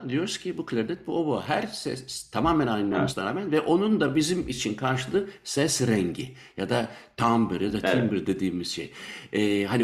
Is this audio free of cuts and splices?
yes; 0 cuts

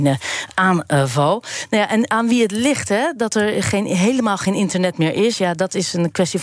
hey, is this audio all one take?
yes; 0 cuts

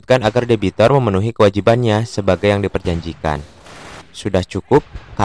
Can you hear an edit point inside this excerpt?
yes; 1 cut; at 4.0 s

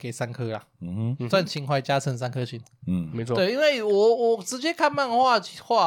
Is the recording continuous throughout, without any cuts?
yes; 0 cuts

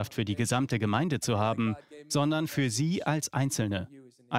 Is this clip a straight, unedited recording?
yes; 0 cuts

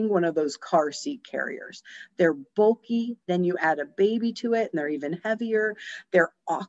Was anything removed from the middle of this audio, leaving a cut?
yes; 1 cut; at 3.2 s

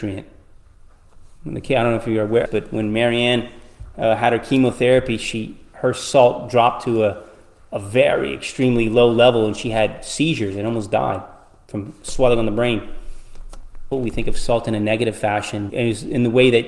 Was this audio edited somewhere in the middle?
yes; 3 cuts; at 2.5 s, 13.9 s, 15.7 s

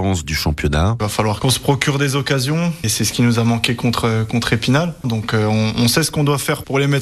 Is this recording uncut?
no; 2 cuts; at 2.8 s, 5.0 s

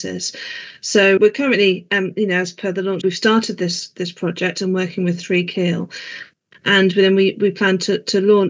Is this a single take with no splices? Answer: no; 2 cuts; at 1.2 s, 3.0 s

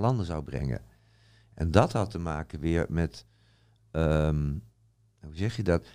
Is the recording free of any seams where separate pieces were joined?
yes; 0 cuts

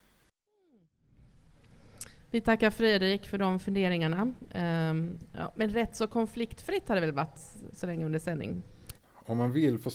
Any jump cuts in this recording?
yes; 1 cut; at 8.9 s

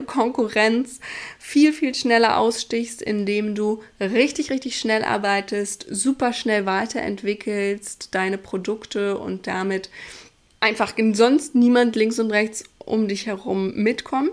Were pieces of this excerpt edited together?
no; 0 cuts

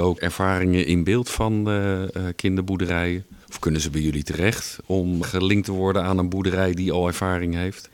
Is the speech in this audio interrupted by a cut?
yes; 2 cuts; at 3.4 s, 5.2 s

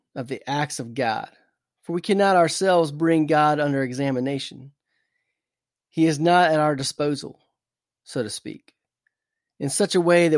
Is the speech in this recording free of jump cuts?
yes; 0 cuts

